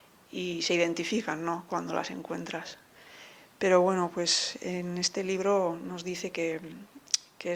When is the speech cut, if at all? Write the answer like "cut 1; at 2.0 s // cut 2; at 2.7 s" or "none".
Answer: none